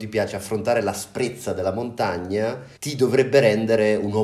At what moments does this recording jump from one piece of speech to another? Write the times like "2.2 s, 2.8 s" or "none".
2.8 s